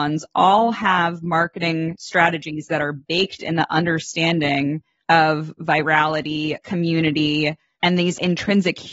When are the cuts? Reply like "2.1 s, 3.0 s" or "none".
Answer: 6.6 s